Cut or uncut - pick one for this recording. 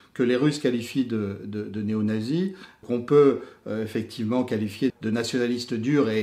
cut